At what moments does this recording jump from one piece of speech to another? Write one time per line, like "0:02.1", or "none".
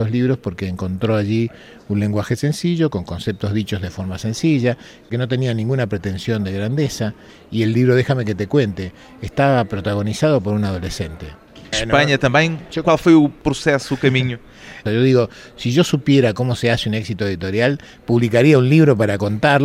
0:11.7
0:14.9